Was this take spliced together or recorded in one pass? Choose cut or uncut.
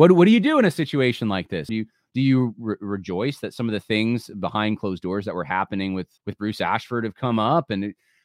cut